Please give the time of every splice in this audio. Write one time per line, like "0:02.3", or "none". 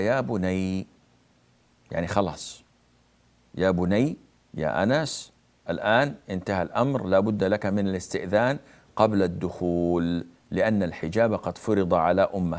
none